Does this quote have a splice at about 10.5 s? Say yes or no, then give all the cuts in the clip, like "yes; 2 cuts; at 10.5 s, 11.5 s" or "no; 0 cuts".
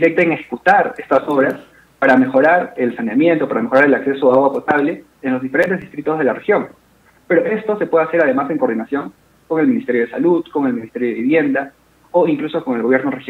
no; 0 cuts